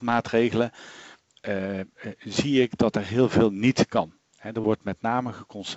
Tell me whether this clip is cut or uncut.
uncut